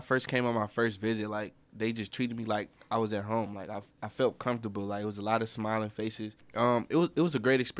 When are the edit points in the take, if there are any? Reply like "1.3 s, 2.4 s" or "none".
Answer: 6.4 s